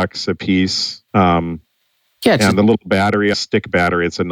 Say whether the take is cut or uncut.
cut